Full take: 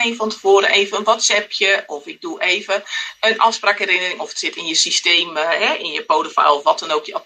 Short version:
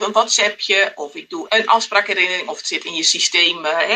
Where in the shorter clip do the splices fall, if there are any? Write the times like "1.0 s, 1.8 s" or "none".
1.5 s